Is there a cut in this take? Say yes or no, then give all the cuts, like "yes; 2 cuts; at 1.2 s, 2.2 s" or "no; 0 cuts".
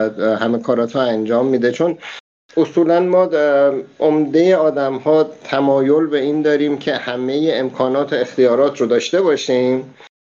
no; 0 cuts